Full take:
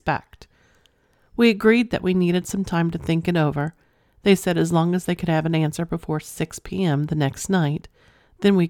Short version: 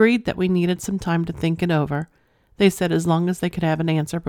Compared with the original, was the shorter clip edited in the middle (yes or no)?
no